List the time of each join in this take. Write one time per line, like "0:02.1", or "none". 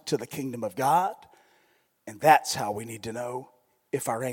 0:01.9